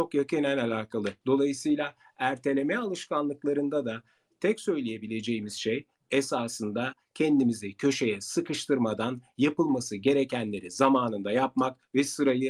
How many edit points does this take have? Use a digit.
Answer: 1